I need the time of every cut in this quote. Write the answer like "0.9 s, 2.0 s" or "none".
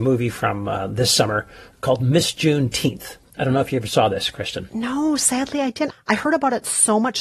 5.9 s